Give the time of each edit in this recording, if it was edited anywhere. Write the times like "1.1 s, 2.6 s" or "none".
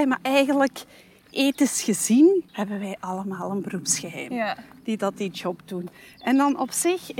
2.5 s

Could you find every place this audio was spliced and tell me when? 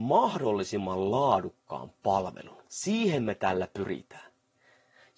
2.7 s

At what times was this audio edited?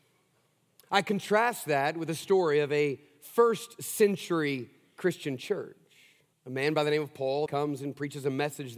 6.3 s, 7.5 s

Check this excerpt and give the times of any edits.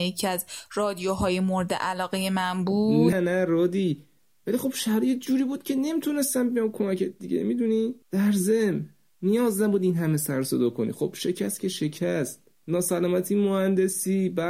3.1 s, 8.0 s

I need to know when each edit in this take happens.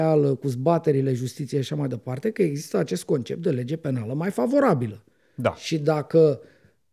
none

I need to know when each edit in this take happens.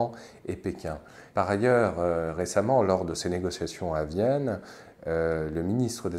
1.3 s

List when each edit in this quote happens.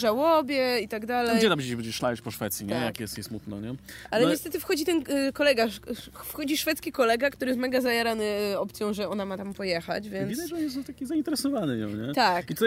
none

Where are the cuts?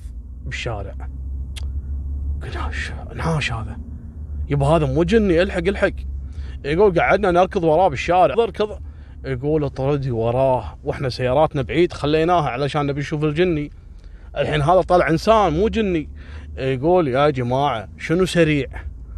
8.3 s

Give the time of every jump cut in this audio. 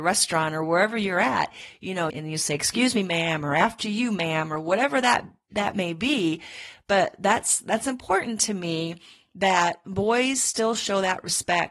2.1 s

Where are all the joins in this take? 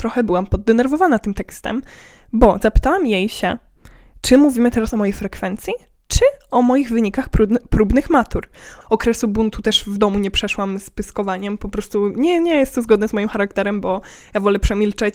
8.8 s

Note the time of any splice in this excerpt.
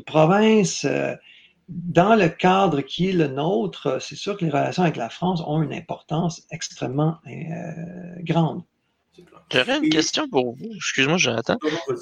none

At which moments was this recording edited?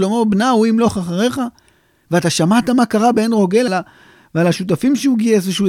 3.7 s

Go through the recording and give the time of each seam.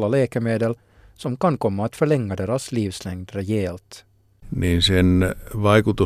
4.3 s

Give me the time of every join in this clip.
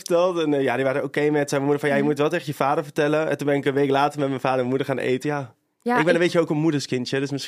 5.2 s

